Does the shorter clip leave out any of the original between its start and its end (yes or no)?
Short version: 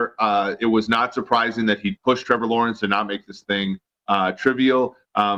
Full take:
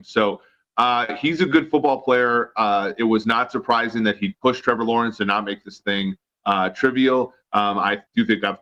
no